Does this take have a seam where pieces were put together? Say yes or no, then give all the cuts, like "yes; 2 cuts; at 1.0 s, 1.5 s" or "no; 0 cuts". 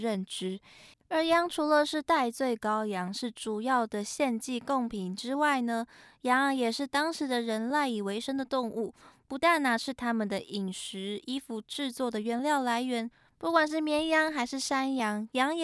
yes; 1 cut; at 0.9 s